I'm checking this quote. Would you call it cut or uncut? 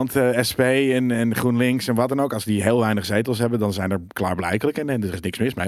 uncut